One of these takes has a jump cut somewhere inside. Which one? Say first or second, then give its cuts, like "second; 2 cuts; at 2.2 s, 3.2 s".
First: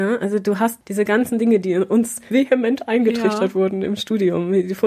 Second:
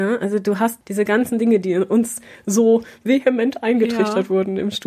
first; 1 cut; at 2.3 s